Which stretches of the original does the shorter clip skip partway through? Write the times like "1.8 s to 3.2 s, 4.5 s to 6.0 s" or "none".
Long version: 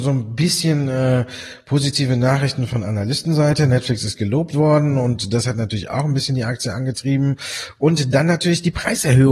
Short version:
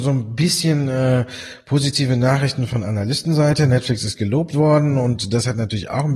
none